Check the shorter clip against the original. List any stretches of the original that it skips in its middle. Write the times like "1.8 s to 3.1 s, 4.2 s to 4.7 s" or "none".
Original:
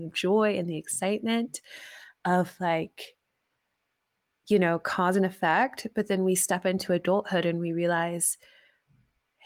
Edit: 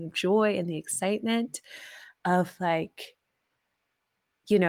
none